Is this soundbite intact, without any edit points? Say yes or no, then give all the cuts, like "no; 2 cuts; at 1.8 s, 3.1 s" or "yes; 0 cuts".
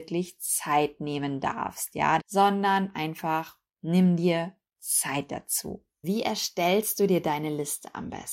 no; 2 cuts; at 2.2 s, 6.0 s